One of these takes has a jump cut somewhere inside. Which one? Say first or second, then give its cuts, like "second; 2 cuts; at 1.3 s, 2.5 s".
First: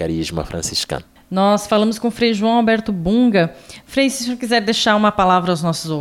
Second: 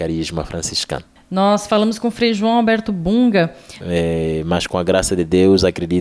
second; 1 cut; at 3.8 s